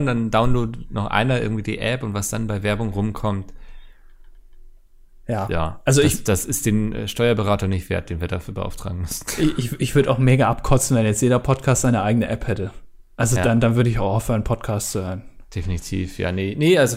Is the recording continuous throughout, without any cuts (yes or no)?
yes